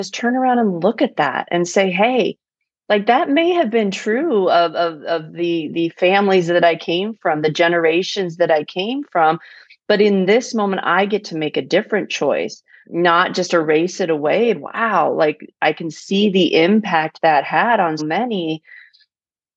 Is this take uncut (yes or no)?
no